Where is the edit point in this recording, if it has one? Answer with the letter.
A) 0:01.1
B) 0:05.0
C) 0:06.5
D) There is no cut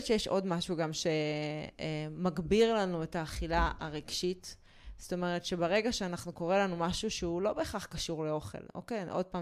D